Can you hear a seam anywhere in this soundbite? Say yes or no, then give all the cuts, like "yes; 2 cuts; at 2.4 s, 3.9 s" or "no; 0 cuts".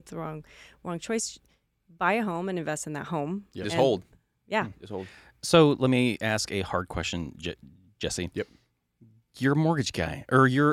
no; 0 cuts